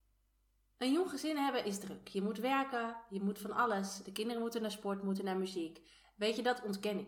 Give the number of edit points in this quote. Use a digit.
0